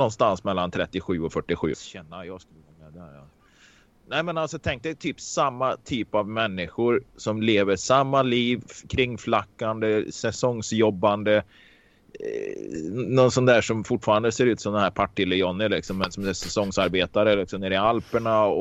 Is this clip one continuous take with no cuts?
no; 1 cut; at 1.7 s

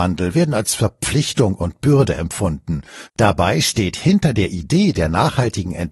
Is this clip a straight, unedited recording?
no; 1 cut; at 3.0 s

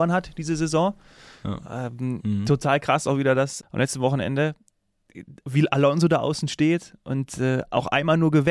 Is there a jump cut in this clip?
yes; 1 cut; at 3.6 s

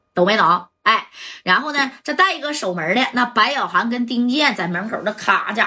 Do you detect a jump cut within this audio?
no; 0 cuts

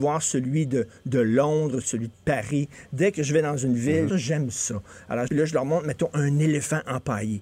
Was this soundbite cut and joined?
yes; 3 cuts; at 1.8 s, 4.1 s, 5.3 s

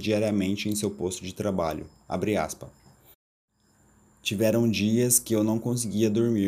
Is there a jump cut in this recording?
no; 0 cuts

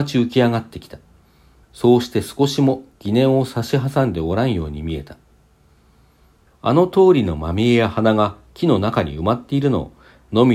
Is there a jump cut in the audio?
yes; 2 cuts; at 1.6 s, 6.5 s

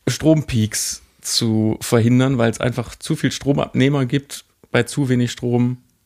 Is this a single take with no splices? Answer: yes; 0 cuts

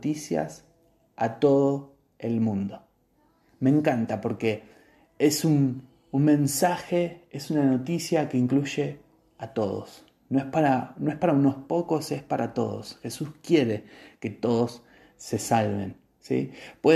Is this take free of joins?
yes; 0 cuts

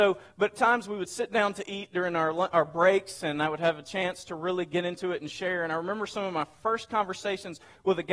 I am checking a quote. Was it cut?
no; 0 cuts

